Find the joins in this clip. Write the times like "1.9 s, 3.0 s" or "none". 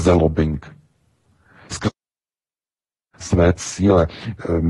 none